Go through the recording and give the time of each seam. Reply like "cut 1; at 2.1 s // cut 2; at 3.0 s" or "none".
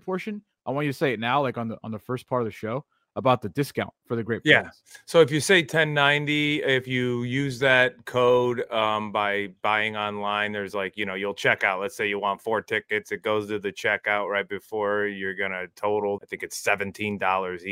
cut 1; at 16.2 s